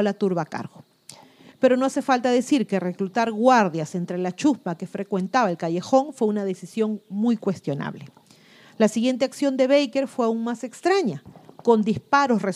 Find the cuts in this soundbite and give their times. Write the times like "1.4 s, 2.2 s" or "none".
1.5 s